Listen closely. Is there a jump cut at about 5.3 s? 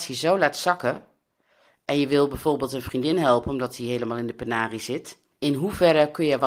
yes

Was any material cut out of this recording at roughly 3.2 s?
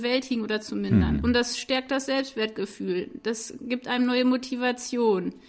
no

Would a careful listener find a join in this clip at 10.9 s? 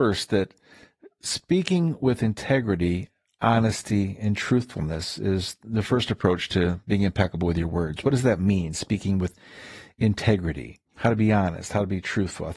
yes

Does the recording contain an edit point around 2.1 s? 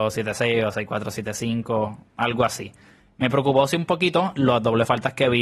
no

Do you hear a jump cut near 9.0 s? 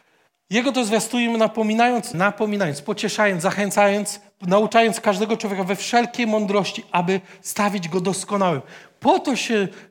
no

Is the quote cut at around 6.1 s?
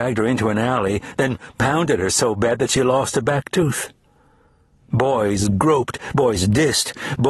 no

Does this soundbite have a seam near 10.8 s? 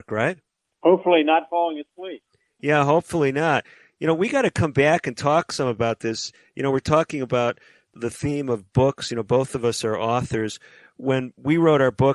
no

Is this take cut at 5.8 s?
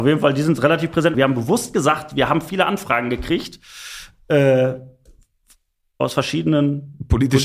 no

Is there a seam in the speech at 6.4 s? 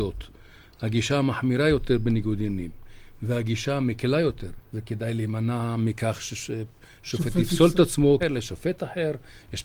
no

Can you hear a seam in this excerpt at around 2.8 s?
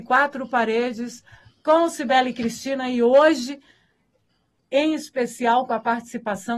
no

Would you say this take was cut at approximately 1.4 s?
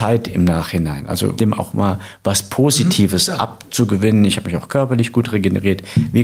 yes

